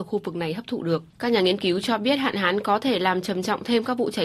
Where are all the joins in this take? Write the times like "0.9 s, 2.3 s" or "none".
1.1 s